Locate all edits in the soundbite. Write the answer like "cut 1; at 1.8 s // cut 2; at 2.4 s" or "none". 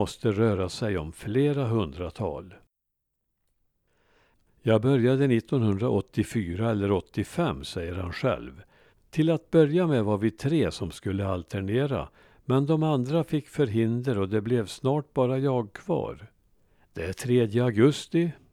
cut 1; at 8.9 s // cut 2; at 16.8 s